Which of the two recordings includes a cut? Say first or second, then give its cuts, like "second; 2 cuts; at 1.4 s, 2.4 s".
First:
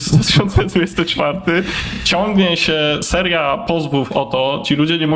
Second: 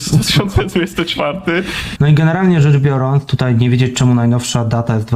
second; 1 cut; at 2.0 s